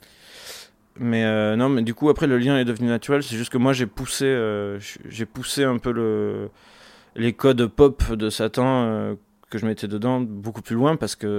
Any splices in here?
no; 0 cuts

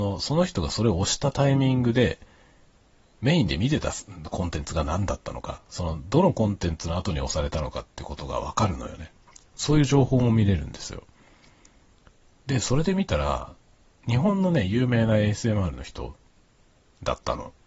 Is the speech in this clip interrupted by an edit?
no; 0 cuts

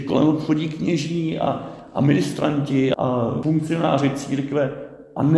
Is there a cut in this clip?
no; 0 cuts

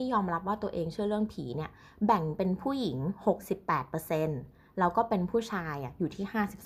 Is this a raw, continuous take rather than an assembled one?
yes; 0 cuts

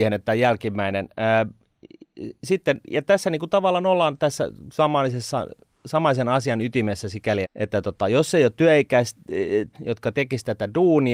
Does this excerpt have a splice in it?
yes; 2 cuts; at 7.4 s, 9.7 s

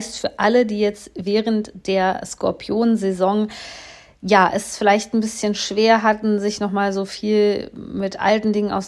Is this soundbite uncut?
yes; 0 cuts

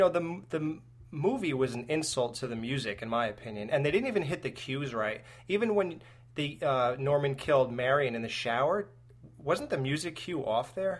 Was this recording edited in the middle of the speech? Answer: no; 0 cuts

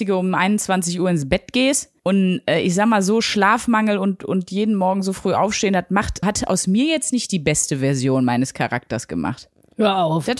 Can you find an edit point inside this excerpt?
yes; 1 cut; at 6.2 s

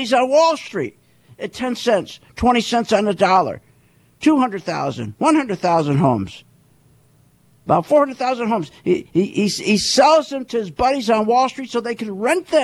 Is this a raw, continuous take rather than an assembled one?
yes; 0 cuts

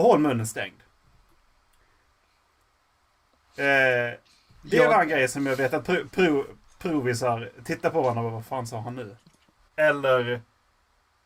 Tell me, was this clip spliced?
yes; 2 cuts; at 6.1 s, 9.6 s

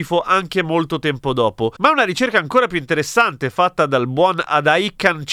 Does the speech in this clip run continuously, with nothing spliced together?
yes; 0 cuts

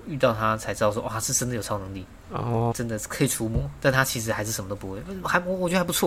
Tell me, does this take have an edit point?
yes; 1 cut; at 2.7 s

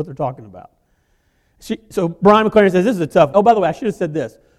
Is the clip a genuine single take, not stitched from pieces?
no; 1 cut; at 3.3 s

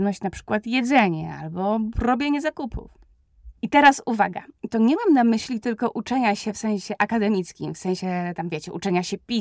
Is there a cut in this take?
yes; 2 cuts; at 3.6 s, 4.7 s

